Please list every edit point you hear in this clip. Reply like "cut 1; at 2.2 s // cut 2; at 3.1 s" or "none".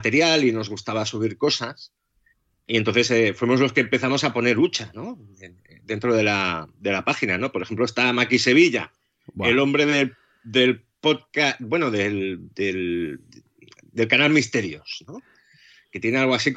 none